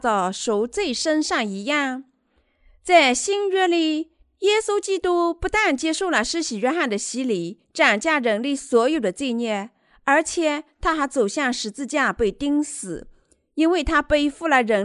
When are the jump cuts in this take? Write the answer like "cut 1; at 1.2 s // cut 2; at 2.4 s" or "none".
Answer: none